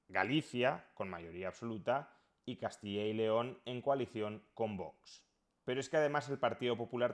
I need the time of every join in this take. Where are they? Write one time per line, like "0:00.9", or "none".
0:05.6